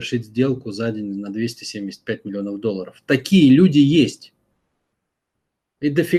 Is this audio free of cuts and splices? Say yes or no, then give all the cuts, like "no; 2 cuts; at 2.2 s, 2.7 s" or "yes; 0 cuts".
yes; 0 cuts